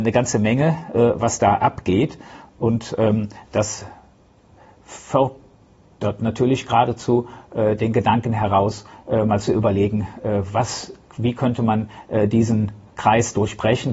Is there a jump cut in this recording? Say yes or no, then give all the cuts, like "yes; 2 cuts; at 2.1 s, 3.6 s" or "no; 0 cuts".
no; 0 cuts